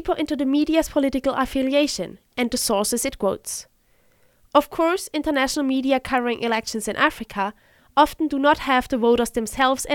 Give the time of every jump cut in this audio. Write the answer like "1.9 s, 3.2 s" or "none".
2.3 s